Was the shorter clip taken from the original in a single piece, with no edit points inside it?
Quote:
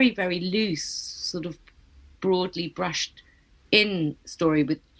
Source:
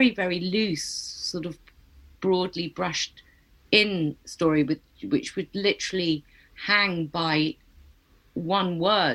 yes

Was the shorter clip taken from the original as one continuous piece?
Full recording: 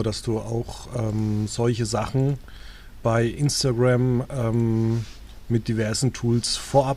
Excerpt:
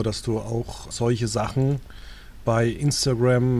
no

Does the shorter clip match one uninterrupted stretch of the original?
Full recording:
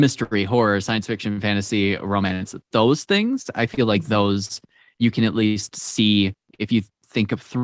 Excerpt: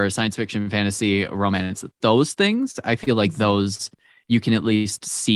yes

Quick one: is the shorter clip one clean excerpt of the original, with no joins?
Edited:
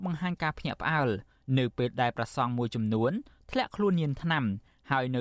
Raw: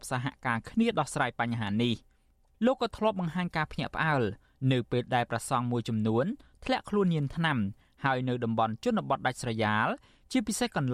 yes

